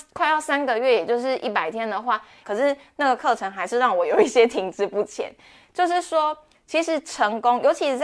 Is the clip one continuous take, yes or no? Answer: no